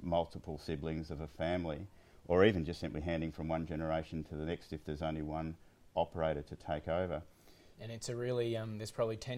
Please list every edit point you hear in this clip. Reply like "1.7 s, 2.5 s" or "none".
7.7 s